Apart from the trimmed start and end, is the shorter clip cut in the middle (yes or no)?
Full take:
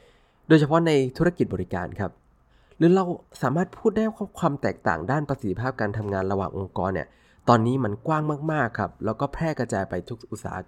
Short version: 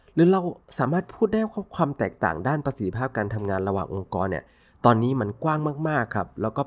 no